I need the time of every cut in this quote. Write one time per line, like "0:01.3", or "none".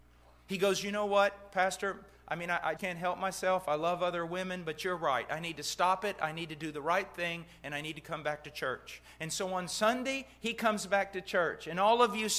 0:02.8